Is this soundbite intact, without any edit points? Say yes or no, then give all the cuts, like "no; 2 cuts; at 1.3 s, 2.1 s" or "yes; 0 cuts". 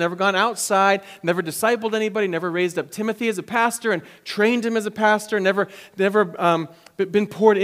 yes; 0 cuts